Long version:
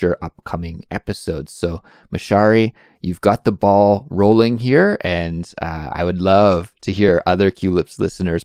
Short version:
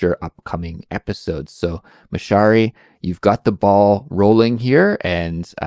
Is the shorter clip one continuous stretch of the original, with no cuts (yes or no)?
yes